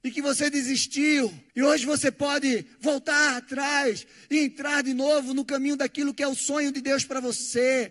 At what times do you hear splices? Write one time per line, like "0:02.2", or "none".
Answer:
0:01.5